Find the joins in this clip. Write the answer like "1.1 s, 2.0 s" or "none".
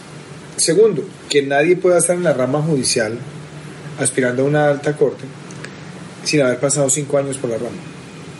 none